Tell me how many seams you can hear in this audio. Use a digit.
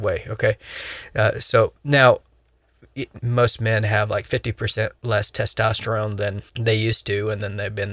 2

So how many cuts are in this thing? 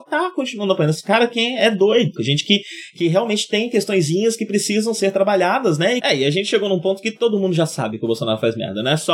2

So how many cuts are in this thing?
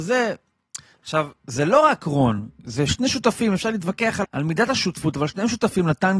2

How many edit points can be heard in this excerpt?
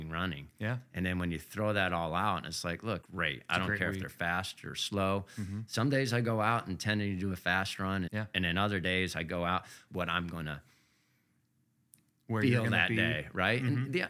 3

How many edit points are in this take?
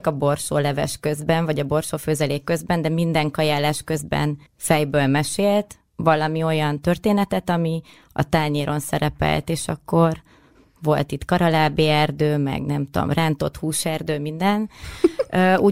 1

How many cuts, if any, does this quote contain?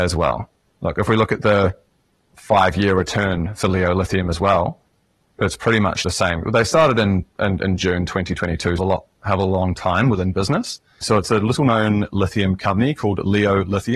2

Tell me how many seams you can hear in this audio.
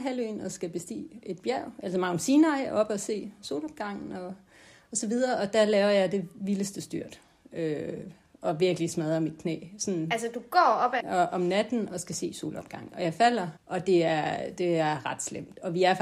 2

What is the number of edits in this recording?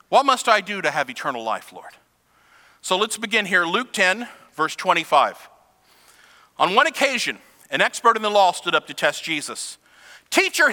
0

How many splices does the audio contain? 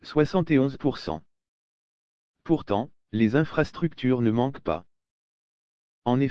1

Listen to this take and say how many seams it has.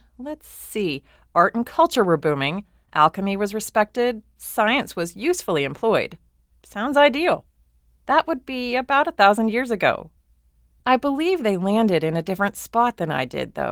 0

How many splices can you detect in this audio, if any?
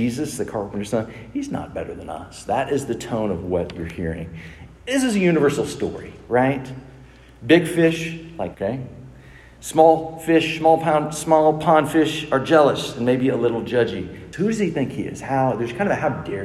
2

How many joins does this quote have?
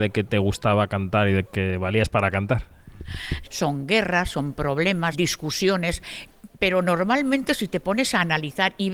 2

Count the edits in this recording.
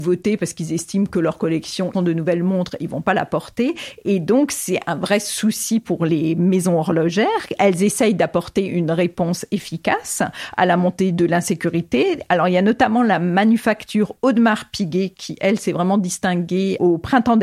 1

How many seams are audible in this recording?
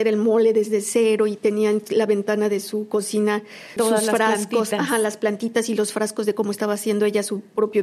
1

